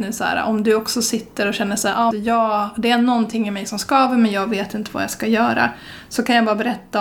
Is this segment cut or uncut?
cut